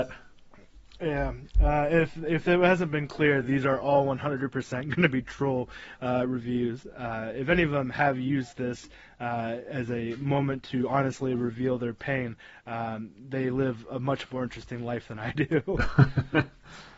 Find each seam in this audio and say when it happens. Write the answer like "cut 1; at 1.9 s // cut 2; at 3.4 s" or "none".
none